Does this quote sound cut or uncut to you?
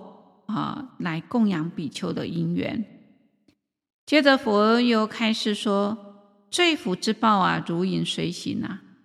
uncut